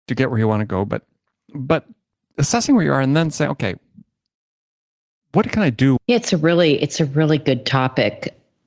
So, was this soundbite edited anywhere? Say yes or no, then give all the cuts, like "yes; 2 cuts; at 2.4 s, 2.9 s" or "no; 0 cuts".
yes; 1 cut; at 6.0 s